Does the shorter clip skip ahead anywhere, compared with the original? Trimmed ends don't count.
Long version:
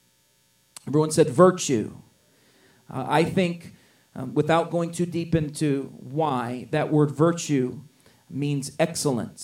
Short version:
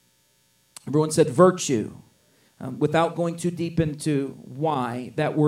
yes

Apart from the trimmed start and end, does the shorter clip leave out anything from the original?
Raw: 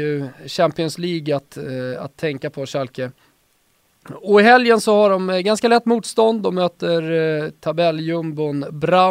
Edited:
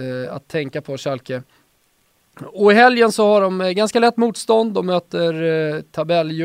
no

